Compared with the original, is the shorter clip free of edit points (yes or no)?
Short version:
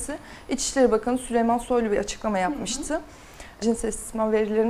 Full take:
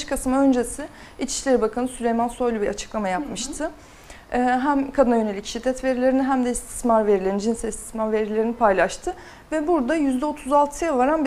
no